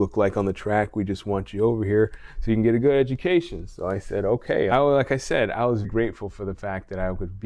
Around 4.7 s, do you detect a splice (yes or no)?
yes